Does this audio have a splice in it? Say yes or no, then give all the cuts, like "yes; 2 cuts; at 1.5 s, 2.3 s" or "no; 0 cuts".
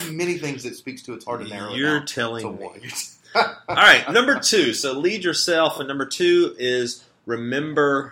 no; 0 cuts